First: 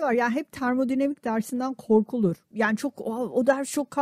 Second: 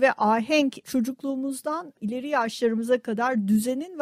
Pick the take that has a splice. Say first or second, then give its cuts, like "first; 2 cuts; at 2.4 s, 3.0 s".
first; 1 cut; at 2.5 s